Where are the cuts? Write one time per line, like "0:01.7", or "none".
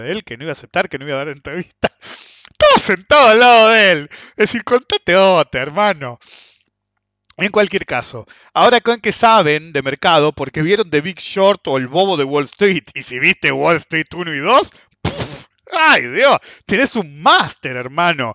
none